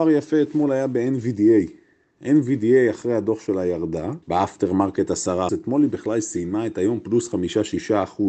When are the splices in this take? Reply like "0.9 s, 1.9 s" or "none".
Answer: 4.2 s, 5.5 s